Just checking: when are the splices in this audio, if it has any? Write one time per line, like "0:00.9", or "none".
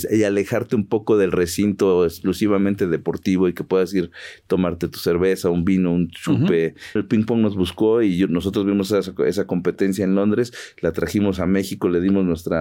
0:07.0